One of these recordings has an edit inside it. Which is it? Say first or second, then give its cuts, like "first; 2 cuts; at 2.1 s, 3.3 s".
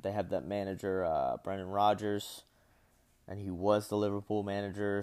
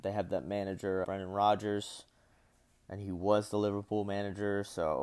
second; 1 cut; at 1.0 s